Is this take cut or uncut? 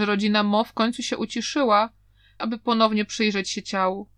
cut